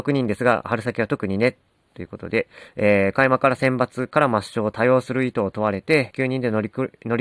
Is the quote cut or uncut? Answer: cut